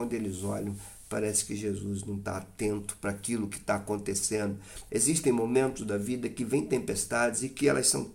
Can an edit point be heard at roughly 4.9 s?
yes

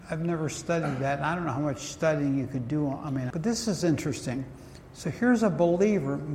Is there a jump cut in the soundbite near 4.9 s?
no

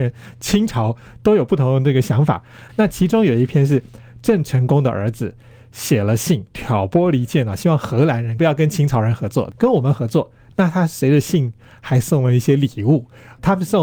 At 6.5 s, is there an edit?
yes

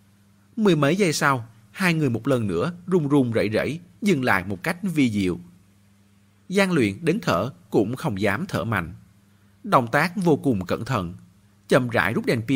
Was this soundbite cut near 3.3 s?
no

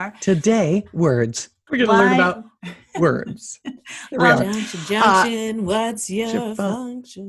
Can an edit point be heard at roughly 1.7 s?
yes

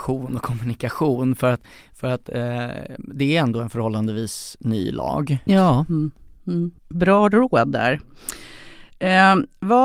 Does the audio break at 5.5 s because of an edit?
yes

